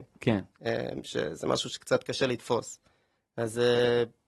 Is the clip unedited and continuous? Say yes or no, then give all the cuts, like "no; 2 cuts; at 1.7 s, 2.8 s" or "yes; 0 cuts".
yes; 0 cuts